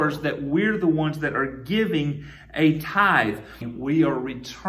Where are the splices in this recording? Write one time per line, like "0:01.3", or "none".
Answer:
0:03.6

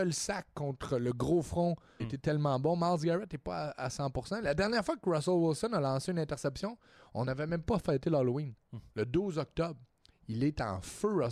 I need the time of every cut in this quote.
0:02.0

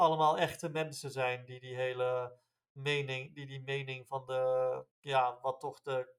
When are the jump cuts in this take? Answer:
0:04.9

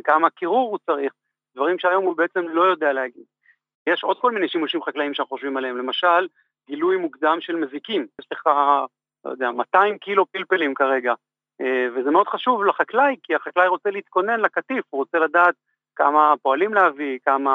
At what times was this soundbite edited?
0:08.2

